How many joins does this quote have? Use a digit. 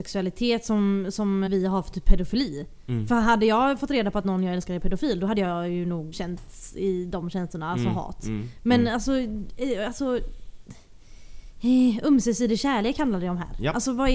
2